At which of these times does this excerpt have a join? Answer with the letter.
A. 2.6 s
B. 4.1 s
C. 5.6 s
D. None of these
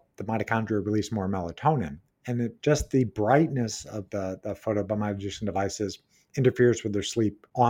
A